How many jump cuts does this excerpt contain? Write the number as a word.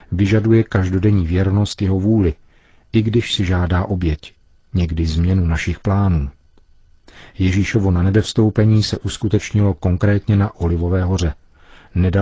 zero